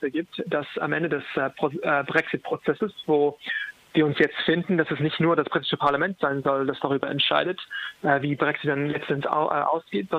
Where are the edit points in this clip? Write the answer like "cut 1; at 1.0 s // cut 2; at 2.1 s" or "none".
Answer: none